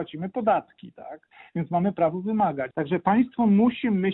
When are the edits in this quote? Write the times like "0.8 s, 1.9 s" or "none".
2.7 s